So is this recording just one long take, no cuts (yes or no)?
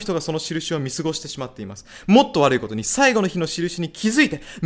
yes